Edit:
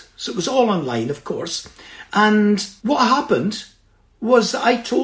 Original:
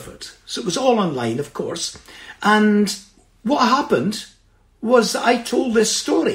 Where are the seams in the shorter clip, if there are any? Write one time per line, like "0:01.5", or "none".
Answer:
0:02.8